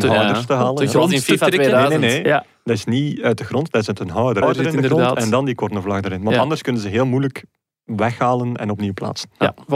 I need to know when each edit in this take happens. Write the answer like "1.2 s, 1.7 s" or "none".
4.4 s